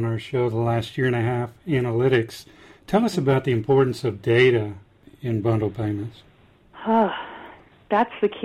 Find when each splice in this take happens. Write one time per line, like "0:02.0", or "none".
none